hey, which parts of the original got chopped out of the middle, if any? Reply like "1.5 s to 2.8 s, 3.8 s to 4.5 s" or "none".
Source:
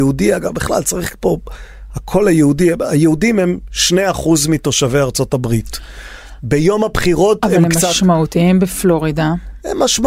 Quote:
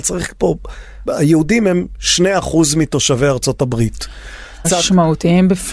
1.9 s to 2.8 s, 6.4 s to 7.8 s